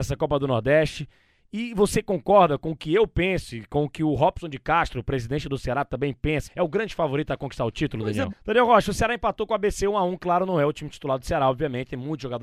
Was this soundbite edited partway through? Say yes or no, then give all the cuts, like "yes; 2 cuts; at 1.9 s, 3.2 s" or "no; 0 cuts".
yes; 2 cuts; at 6.4 s, 8.3 s